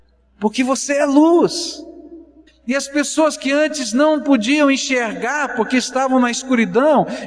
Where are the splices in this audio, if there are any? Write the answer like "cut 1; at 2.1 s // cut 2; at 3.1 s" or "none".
cut 1; at 2.5 s